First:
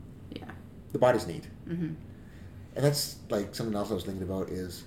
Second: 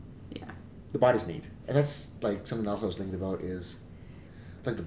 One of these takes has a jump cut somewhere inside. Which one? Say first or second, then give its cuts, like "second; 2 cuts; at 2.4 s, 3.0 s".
second; 1 cut; at 1.6 s